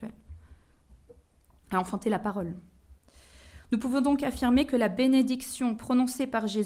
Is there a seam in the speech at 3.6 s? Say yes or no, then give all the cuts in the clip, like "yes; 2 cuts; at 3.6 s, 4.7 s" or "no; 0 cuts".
no; 0 cuts